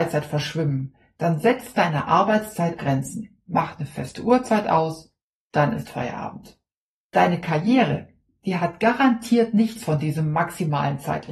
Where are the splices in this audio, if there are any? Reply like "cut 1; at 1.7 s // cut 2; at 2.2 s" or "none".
cut 1; at 2.8 s